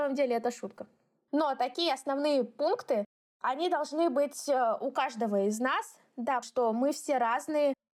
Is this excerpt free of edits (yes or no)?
no